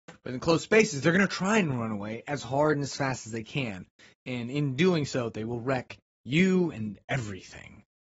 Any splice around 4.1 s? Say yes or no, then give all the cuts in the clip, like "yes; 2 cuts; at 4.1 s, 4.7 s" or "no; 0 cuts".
no; 0 cuts